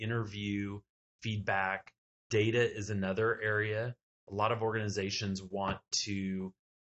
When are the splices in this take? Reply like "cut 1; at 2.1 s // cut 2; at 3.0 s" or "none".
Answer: cut 1; at 2.2 s